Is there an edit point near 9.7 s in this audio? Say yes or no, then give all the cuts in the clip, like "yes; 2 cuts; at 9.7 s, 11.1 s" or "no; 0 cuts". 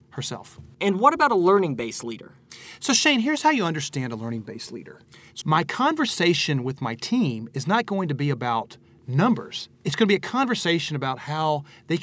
yes; 2 cuts; at 5.4 s, 9.7 s